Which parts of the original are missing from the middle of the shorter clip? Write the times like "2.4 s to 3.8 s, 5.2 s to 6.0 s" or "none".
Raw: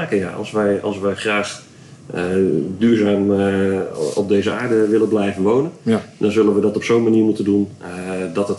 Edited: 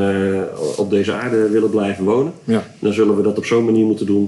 none